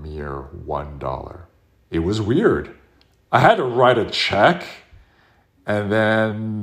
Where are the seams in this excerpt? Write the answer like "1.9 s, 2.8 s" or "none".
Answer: 1.8 s